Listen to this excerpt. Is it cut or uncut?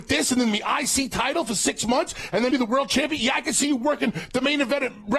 cut